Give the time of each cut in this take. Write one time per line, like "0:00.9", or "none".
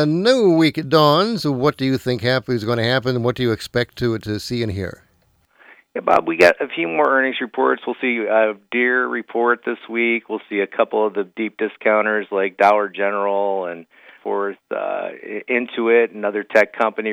none